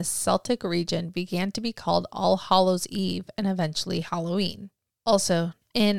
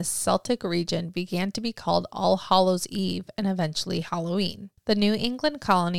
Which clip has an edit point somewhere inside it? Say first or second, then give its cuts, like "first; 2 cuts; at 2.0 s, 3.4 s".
second; 1 cut; at 4.8 s